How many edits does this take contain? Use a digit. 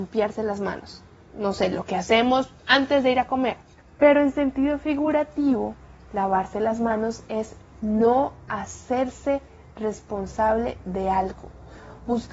1